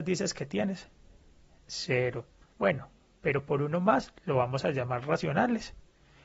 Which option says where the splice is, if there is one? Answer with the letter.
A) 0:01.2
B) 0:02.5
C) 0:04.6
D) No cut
B